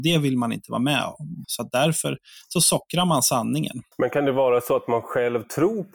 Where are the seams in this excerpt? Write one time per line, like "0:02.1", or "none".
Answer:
0:01.4
0:03.9